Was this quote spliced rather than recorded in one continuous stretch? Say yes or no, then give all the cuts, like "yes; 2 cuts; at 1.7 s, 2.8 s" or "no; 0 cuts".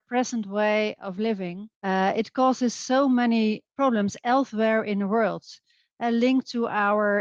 yes; 1 cut; at 1.7 s